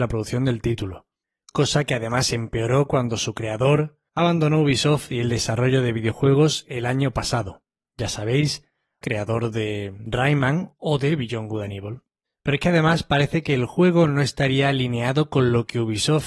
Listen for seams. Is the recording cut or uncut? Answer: cut